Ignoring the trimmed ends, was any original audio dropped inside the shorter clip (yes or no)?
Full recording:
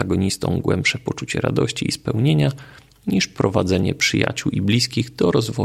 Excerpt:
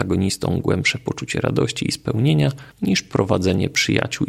yes